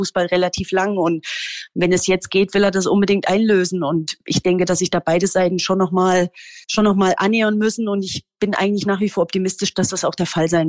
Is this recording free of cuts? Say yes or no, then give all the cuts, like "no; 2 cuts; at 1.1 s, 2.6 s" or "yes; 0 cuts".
no; 1 cut; at 6.6 s